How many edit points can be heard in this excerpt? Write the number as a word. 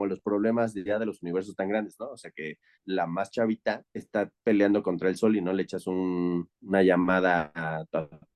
two